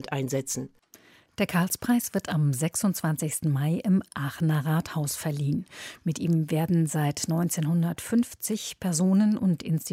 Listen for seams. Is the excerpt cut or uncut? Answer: uncut